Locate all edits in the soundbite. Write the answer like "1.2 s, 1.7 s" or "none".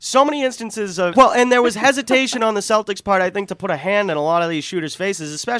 1.1 s